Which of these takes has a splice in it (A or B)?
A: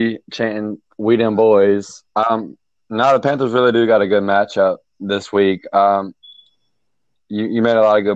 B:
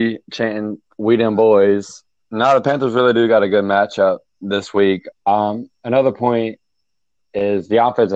B